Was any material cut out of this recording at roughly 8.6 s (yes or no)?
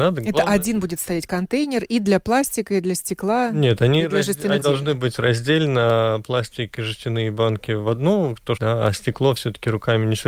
yes